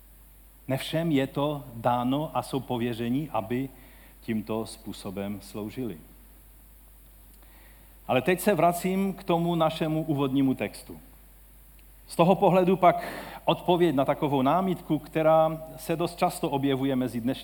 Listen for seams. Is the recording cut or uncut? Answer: cut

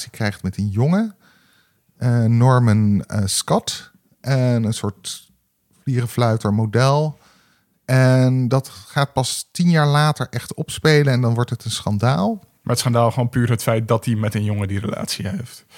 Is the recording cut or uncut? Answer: cut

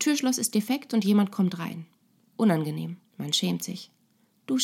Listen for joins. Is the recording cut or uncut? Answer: cut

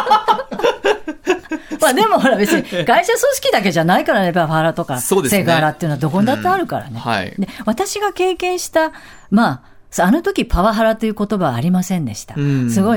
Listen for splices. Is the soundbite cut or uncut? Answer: uncut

